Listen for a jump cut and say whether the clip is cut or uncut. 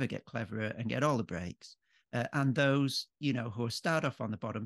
uncut